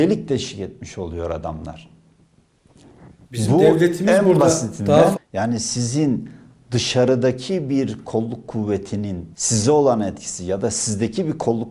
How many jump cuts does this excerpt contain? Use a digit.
2